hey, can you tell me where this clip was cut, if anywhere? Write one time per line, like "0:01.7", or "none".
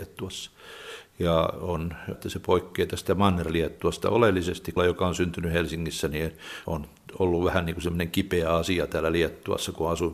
0:02.1
0:04.8
0:06.6

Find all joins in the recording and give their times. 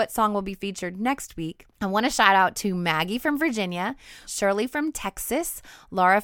0:01.7
0:04.3

